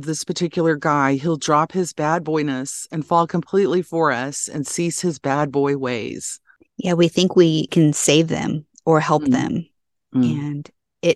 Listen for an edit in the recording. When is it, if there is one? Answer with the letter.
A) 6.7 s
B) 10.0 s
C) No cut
B